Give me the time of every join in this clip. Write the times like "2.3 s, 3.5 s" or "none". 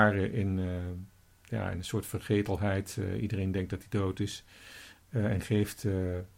5.0 s